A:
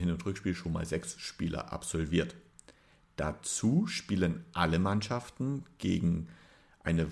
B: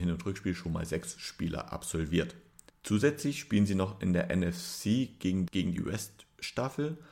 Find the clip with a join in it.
B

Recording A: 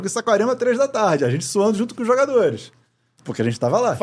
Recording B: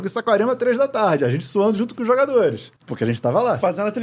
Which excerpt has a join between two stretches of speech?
B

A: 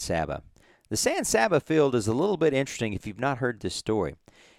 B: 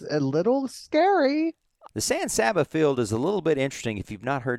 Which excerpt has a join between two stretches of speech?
B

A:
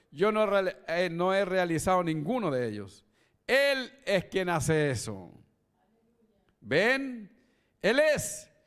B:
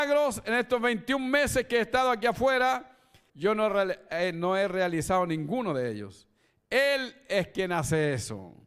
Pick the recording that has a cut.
B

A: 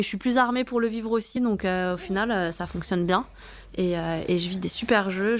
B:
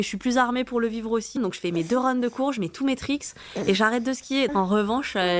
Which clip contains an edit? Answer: B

